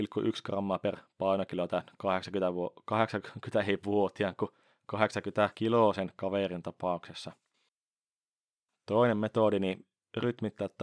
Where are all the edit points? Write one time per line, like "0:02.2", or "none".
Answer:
none